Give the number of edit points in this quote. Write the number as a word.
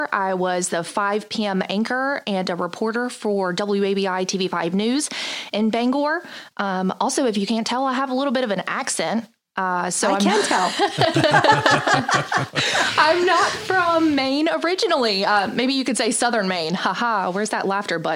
zero